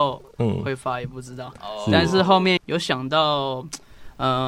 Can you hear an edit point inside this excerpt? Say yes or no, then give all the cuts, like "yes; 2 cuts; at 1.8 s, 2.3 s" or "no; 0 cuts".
yes; 1 cut; at 2.6 s